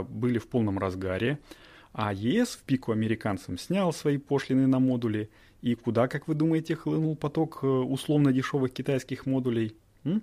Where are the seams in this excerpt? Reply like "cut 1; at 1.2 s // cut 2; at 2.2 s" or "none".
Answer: none